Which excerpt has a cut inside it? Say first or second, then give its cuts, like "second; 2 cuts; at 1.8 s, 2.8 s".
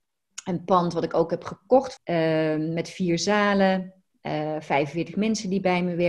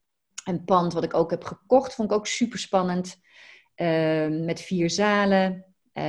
first; 1 cut; at 2.0 s